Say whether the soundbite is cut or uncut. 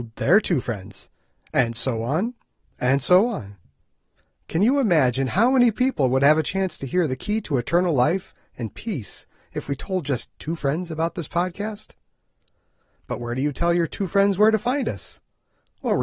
uncut